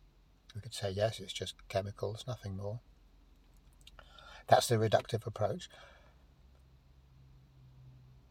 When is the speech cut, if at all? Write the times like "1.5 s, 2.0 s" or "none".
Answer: none